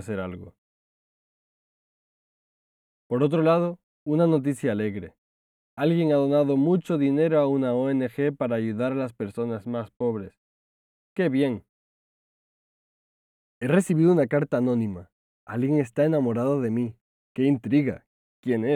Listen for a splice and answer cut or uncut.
uncut